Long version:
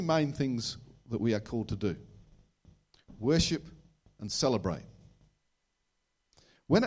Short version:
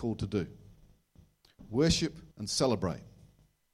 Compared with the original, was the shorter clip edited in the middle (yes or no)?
yes